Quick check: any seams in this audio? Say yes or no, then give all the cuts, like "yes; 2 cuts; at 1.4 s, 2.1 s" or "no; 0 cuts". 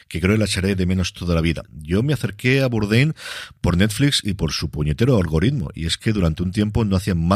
yes; 1 cut; at 1.6 s